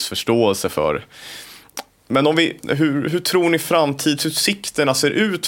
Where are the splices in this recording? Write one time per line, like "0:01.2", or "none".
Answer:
0:02.6